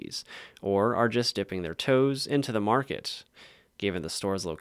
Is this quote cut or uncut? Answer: uncut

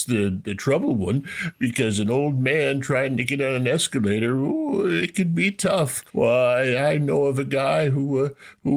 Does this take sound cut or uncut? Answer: cut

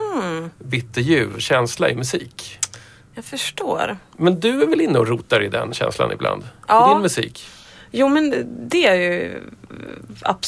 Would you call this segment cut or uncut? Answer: uncut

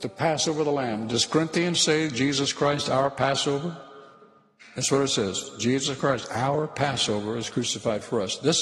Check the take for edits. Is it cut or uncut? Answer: uncut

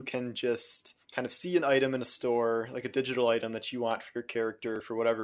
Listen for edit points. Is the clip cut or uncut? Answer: cut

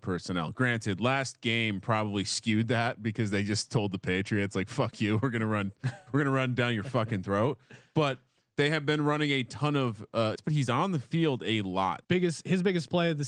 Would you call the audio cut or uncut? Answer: cut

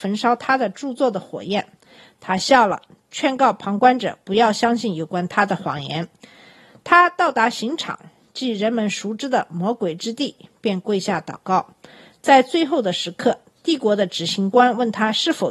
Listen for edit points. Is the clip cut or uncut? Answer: uncut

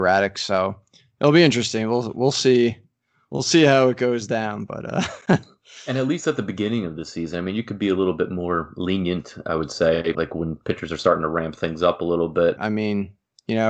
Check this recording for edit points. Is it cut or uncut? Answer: cut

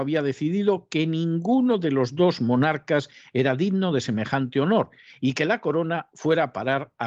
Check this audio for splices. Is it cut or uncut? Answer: uncut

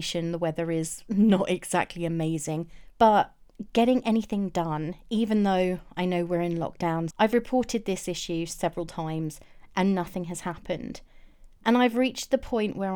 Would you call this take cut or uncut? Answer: cut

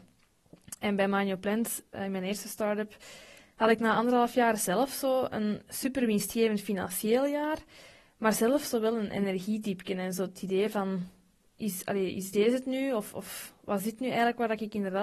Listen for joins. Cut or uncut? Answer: uncut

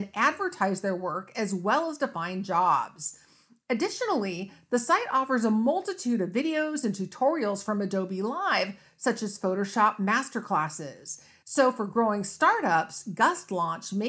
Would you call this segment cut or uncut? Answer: cut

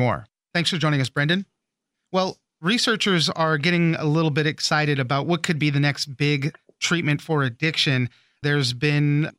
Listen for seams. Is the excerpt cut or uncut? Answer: cut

